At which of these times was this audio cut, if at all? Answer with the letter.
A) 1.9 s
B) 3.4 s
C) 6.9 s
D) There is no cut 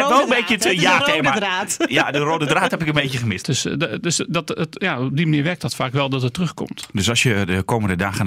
B